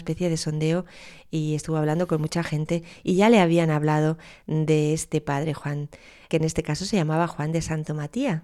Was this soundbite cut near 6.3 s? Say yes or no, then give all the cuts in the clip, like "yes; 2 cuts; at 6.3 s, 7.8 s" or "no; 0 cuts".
yes; 1 cut; at 6.3 s